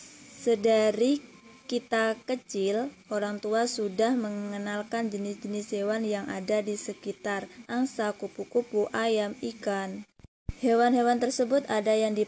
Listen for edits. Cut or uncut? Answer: cut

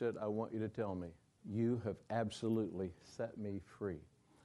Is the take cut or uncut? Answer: cut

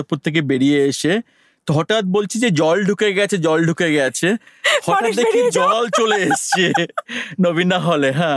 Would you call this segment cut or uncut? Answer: uncut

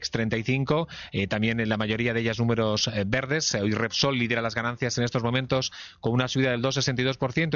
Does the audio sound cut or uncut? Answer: uncut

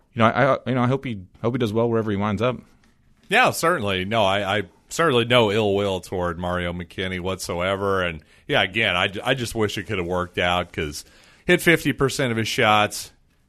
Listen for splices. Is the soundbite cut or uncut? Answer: cut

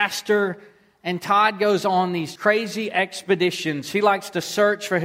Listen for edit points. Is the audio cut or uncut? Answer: cut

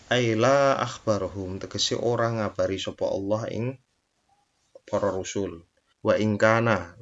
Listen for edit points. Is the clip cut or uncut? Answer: cut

